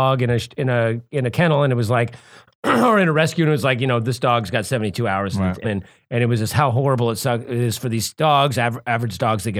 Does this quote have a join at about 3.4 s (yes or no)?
no